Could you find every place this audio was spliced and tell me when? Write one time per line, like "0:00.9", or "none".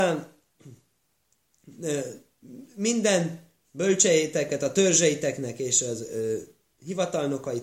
none